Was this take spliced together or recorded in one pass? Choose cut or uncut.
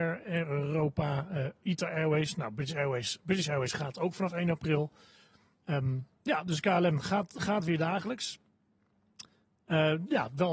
uncut